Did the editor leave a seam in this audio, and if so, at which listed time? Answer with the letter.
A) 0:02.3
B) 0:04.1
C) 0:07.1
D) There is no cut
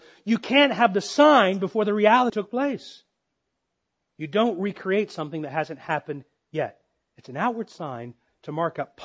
A